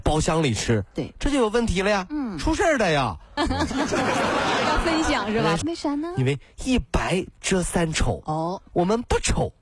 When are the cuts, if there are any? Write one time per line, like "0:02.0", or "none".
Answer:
0:03.4
0:05.6